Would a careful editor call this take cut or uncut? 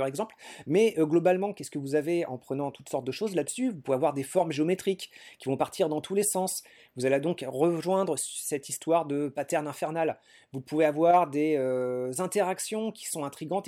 uncut